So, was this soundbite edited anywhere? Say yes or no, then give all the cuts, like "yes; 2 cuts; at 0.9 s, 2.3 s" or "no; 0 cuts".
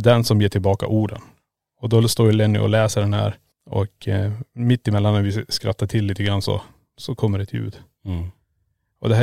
no; 0 cuts